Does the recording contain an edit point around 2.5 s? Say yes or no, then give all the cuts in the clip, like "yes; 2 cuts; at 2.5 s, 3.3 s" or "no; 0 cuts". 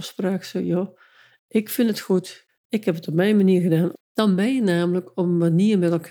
yes; 2 cuts; at 2.5 s, 3.9 s